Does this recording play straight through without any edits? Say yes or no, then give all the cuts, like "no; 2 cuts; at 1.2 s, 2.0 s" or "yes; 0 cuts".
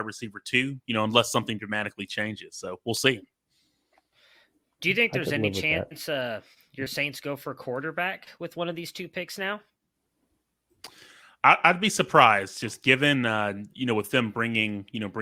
yes; 0 cuts